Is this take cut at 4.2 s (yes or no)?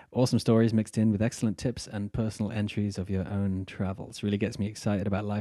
no